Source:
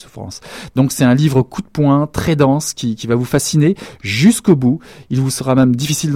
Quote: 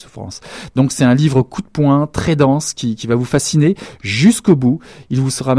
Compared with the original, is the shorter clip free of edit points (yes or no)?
yes